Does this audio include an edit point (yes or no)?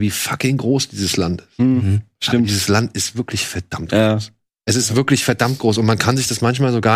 no